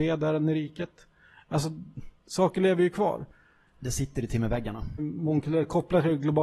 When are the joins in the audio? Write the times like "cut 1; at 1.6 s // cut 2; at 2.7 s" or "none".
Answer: cut 1; at 2.2 s // cut 2; at 5.0 s